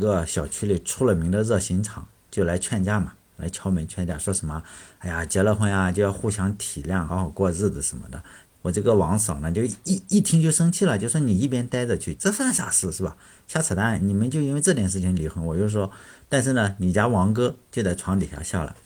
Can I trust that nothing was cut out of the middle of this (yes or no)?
no